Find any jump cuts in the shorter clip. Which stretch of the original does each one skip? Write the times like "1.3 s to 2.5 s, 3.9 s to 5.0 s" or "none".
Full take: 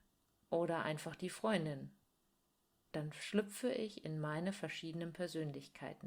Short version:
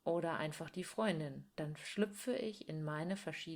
1.9 s to 2.8 s

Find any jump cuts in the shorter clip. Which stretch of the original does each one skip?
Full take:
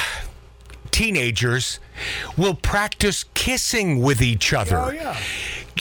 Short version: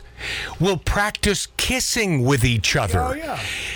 none

